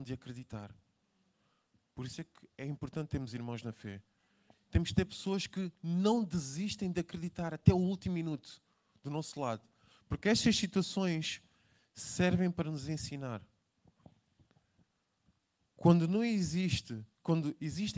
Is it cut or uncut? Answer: uncut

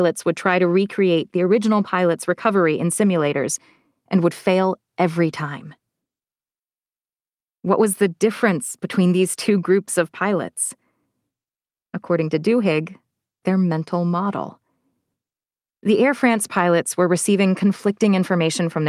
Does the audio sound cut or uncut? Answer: uncut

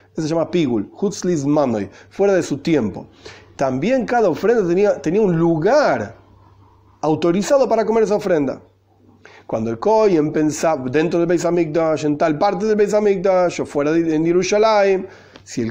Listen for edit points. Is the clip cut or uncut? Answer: uncut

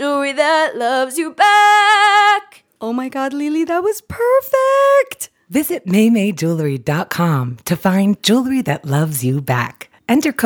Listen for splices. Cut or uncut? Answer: uncut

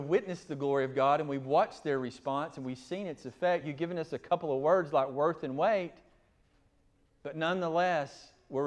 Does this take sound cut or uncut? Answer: uncut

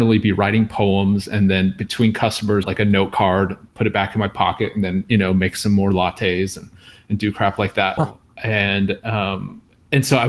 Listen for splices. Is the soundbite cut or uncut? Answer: cut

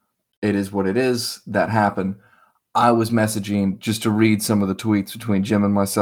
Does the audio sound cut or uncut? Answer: uncut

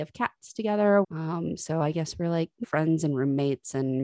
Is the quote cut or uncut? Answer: cut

